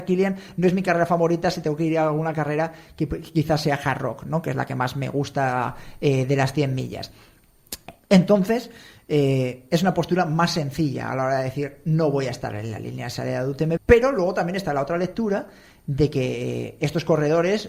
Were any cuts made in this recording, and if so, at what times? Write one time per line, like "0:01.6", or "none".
0:13.8